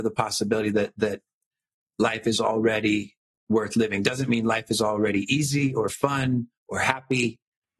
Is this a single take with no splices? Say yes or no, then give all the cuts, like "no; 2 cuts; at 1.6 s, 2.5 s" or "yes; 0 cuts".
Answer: no; 1 cut; at 6.6 s